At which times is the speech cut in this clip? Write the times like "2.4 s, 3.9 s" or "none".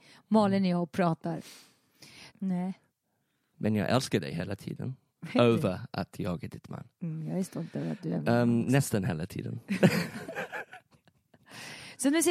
2.3 s, 5.1 s

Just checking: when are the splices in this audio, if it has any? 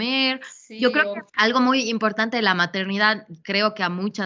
1.3 s

